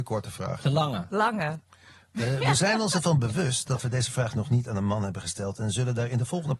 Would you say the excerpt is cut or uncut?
uncut